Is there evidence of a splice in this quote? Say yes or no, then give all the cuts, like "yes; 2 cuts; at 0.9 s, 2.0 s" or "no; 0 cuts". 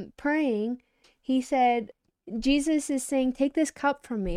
yes; 1 cut; at 1.0 s